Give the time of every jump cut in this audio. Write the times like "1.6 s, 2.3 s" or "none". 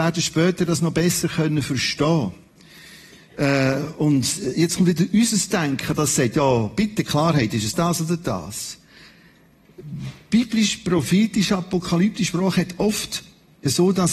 7.7 s